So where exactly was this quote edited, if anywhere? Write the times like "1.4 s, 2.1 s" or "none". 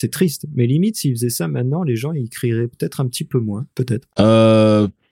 3.7 s